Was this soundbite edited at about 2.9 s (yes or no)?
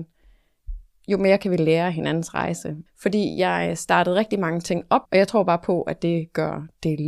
yes